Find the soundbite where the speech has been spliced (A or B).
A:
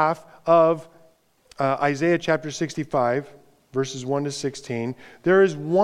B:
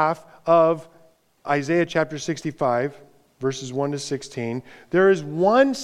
B